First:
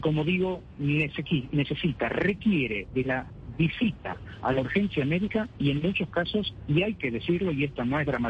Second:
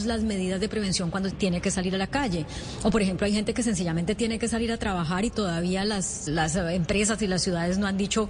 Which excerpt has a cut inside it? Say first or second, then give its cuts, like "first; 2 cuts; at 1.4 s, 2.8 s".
second; 2 cuts; at 1.3 s, 6.3 s